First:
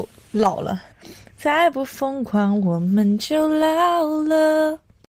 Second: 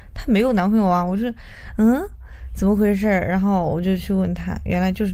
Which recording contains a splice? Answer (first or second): first